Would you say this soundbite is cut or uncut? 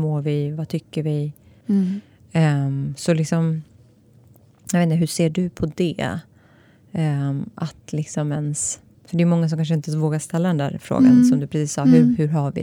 cut